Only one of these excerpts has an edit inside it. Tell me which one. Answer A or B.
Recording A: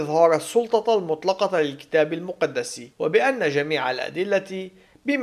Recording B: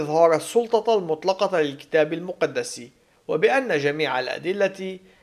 A